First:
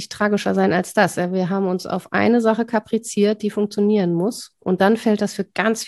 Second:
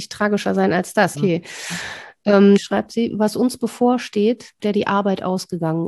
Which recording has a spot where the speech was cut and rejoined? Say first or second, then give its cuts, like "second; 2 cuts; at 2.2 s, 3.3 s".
second; 3 cuts; at 1.1 s, 2.6 s, 4.6 s